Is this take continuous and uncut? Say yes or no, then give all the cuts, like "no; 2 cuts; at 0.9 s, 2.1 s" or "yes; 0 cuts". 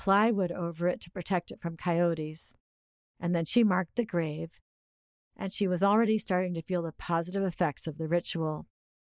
yes; 0 cuts